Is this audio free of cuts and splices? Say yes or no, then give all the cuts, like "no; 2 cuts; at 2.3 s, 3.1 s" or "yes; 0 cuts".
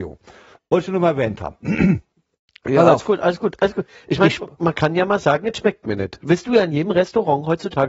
yes; 0 cuts